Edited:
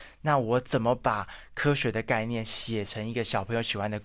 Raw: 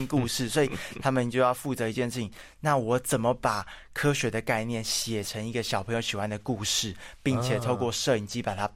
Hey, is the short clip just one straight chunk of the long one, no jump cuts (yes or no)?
yes